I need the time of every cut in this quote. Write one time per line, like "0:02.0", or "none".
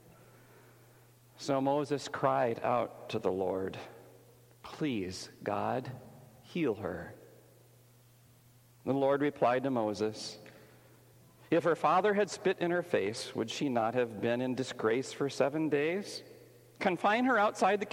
none